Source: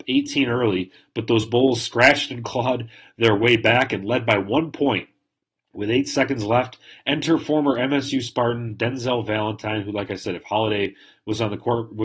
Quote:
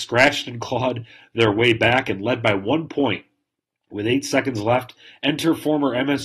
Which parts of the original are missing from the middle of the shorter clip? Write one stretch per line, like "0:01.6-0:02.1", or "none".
none